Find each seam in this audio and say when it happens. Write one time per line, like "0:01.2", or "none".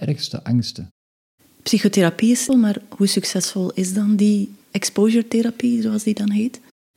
0:02.5
0:04.6